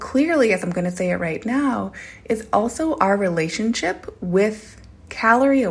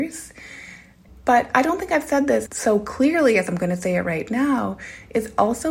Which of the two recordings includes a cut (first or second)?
second